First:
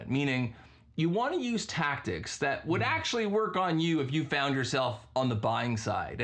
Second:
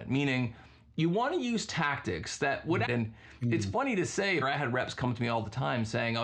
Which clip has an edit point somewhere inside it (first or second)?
second